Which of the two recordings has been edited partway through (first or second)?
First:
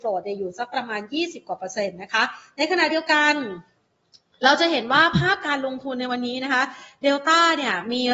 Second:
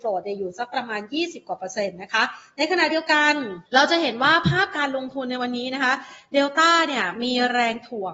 second